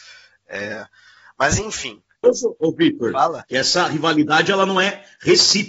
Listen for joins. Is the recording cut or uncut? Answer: uncut